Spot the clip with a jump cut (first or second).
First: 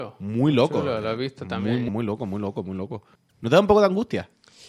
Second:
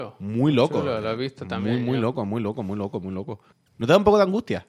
first